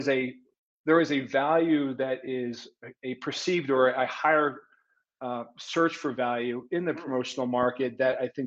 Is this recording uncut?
yes; 0 cuts

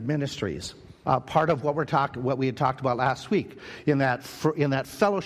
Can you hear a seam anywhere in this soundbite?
yes; 1 cut; at 1.0 s

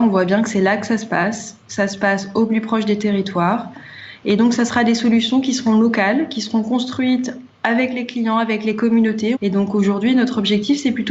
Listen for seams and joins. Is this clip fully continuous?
no; 1 cut; at 9.3 s

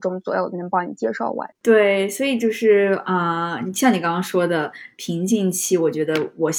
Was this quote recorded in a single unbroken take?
no; 1 cut; at 1.5 s

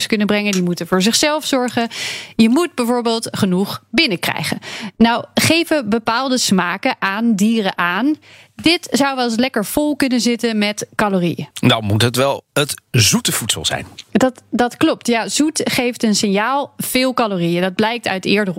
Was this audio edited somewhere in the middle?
no; 0 cuts

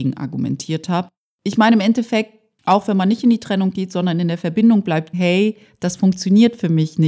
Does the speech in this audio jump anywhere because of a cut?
yes; 1 cut; at 5.1 s

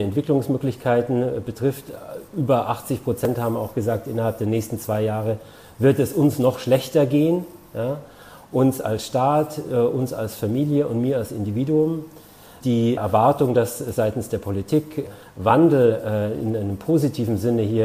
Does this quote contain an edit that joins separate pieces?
no; 0 cuts

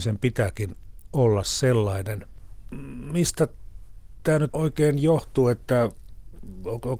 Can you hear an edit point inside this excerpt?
yes; 1 cut; at 4.5 s

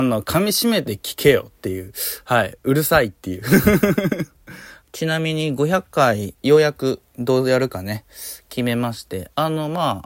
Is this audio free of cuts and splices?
no; 2 cuts; at 4.8 s, 6.4 s

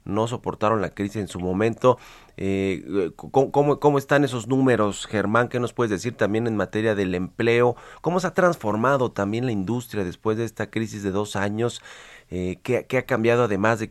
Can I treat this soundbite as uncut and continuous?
yes; 0 cuts

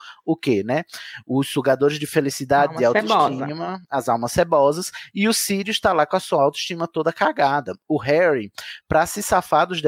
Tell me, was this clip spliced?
no; 0 cuts

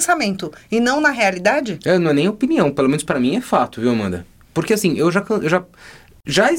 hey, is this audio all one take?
yes; 0 cuts

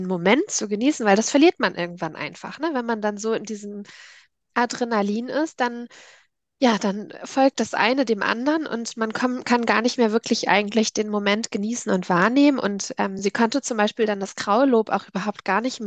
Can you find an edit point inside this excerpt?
no; 0 cuts

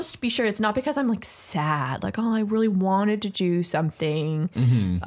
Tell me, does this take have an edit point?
no; 0 cuts

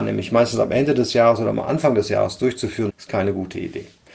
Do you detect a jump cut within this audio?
yes; 1 cut; at 2.9 s

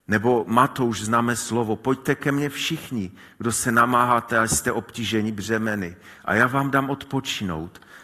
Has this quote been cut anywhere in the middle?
no; 0 cuts

